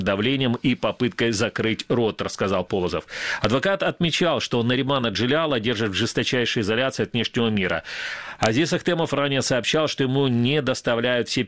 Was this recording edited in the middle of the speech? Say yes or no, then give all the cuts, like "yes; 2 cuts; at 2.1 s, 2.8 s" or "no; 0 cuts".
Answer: no; 0 cuts